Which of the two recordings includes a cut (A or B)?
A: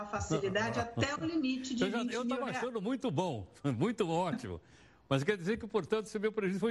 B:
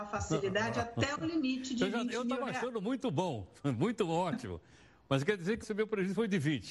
B